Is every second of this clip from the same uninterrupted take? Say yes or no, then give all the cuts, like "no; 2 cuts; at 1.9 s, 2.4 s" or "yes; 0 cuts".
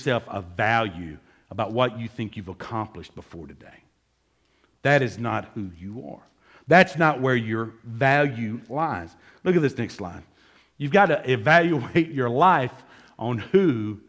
yes; 0 cuts